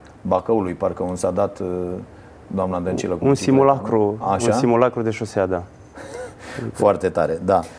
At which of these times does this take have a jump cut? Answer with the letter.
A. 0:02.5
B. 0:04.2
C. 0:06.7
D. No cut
D